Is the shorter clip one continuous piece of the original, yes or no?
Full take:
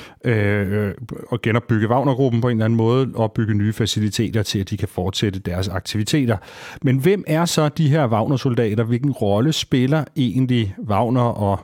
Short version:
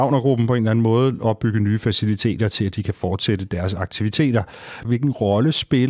no